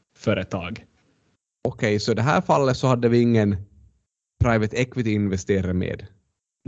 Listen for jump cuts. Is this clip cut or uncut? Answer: cut